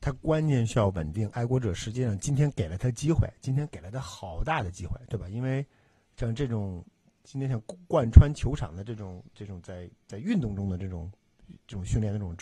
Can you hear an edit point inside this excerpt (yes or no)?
yes